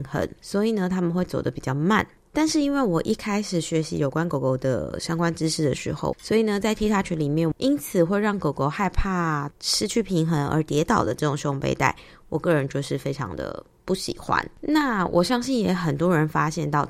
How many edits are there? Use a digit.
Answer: 2